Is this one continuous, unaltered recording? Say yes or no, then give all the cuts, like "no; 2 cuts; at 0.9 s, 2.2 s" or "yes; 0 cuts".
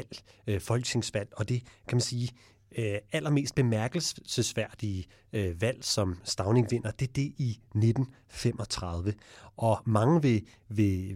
yes; 0 cuts